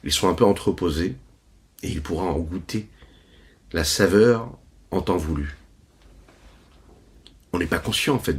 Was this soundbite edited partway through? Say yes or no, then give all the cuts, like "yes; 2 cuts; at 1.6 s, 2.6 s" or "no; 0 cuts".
no; 0 cuts